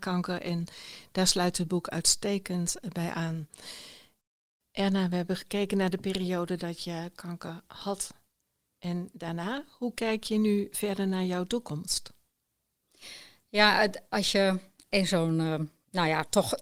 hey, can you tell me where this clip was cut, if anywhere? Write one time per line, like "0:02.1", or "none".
none